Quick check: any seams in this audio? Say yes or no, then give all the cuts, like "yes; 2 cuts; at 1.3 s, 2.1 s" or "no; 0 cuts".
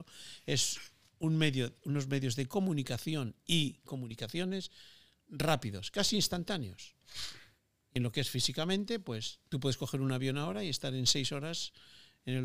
yes; 1 cut; at 9.5 s